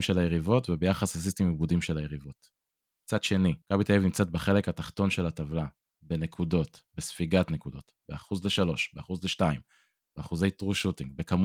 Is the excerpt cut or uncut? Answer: cut